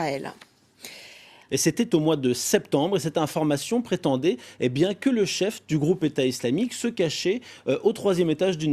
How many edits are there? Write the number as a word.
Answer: one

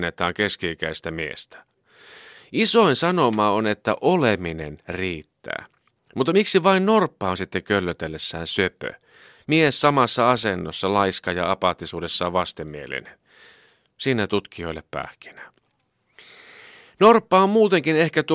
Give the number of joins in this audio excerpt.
zero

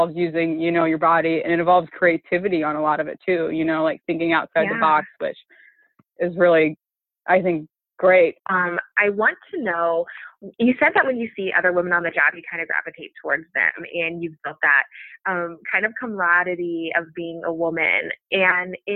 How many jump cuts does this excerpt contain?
two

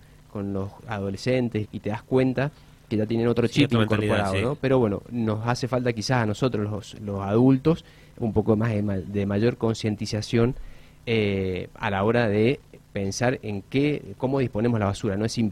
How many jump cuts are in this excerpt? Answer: one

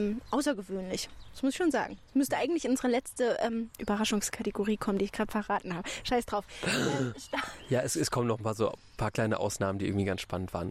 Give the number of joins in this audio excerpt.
zero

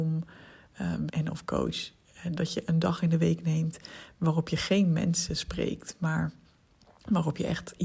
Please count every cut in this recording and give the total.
one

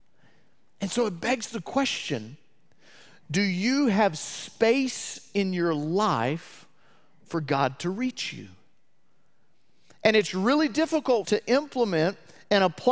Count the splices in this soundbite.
one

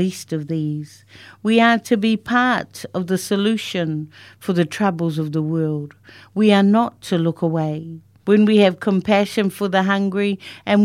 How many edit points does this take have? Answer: one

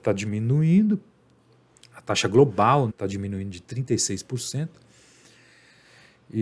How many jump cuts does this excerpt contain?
one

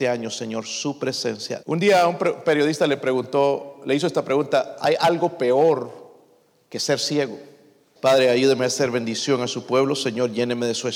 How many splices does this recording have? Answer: two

